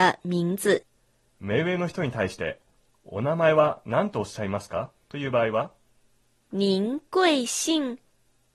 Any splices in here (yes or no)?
no